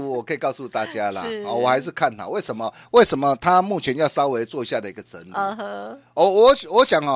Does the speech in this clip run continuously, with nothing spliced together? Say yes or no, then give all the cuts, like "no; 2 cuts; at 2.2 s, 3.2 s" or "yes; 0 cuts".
yes; 0 cuts